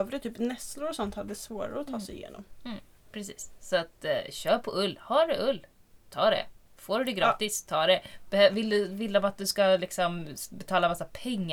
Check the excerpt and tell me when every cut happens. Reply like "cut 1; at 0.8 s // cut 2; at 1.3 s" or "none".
none